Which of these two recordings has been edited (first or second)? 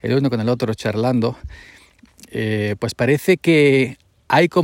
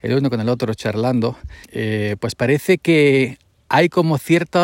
second